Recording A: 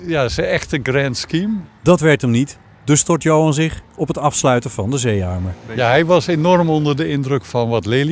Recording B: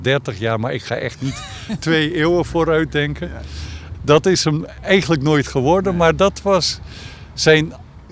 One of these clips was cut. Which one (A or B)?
B